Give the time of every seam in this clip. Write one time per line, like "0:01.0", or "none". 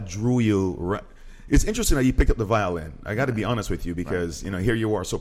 none